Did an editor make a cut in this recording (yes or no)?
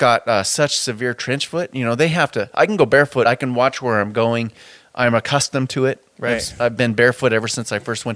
no